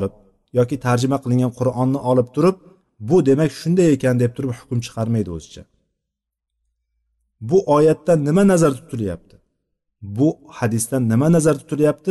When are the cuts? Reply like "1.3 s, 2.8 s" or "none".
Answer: none